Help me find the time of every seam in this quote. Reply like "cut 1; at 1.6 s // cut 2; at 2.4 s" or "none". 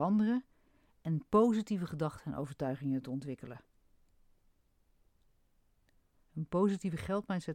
cut 1; at 6.1 s